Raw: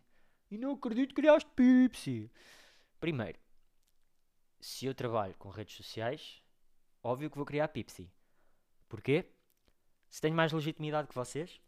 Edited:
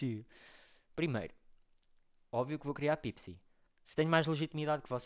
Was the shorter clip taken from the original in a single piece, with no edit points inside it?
no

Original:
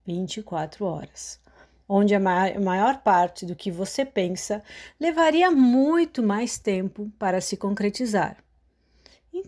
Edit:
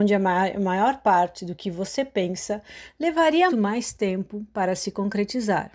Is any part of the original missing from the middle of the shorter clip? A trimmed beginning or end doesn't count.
yes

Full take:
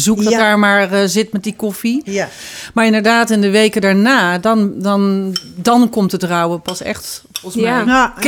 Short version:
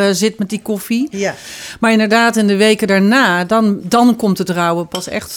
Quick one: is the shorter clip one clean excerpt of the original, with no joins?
no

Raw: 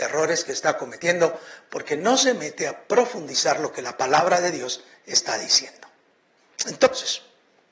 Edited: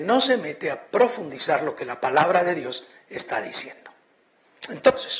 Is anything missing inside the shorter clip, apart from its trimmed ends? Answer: no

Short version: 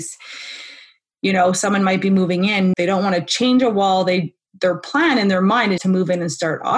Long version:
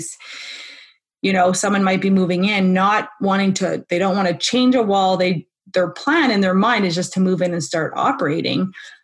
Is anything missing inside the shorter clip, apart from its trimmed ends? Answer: yes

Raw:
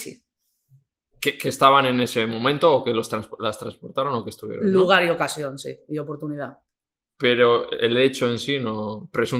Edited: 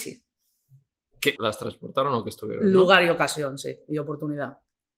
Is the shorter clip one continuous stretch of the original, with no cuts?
no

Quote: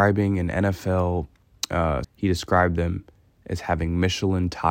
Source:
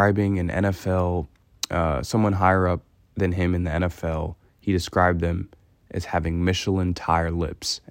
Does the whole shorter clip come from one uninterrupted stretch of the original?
no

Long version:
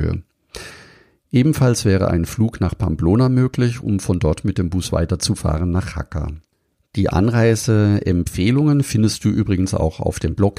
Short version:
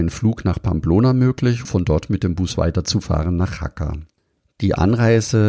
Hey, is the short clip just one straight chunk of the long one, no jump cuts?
no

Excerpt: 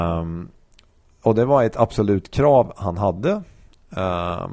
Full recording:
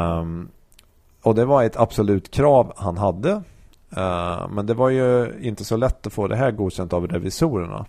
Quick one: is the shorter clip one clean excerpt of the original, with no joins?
yes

